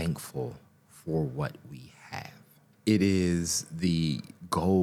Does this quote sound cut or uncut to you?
uncut